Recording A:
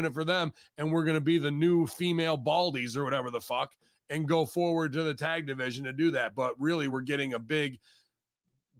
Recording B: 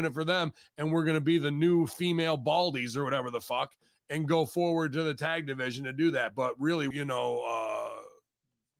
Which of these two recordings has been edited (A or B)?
B